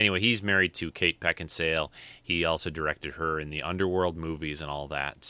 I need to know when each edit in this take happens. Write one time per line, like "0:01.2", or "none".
none